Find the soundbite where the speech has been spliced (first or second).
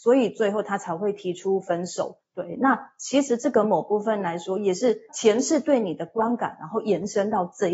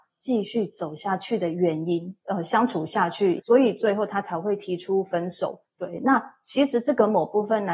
second